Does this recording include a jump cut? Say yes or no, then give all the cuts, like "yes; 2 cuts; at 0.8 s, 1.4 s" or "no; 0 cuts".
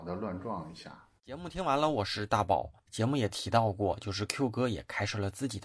yes; 1 cut; at 1.2 s